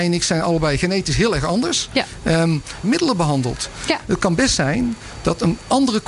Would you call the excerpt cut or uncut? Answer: cut